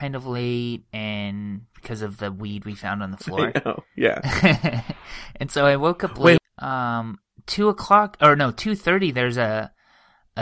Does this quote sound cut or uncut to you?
cut